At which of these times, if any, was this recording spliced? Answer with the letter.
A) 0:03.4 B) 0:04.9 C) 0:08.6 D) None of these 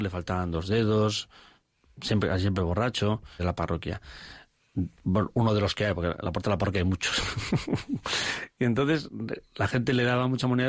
A